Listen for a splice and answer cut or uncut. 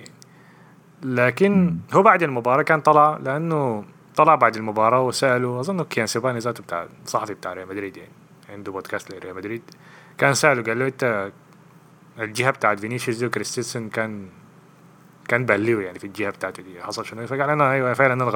uncut